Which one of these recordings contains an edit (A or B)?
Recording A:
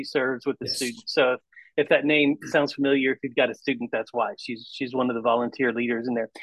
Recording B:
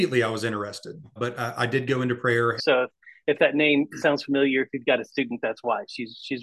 B